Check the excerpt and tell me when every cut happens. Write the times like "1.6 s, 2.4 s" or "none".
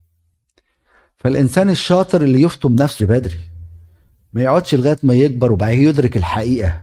3.0 s